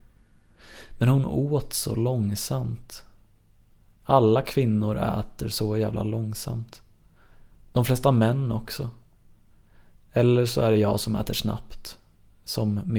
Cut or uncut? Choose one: uncut